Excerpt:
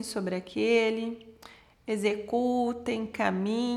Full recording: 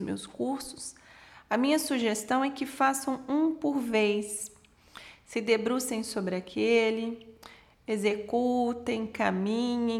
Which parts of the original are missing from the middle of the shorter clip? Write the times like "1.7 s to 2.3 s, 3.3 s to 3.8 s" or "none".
none